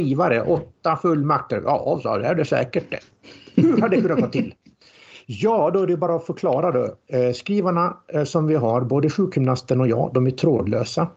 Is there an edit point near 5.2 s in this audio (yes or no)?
no